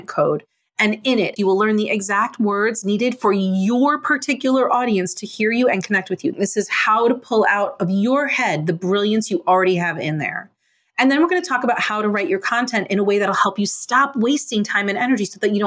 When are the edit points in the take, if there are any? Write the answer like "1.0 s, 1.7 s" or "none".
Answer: 1.4 s, 6.3 s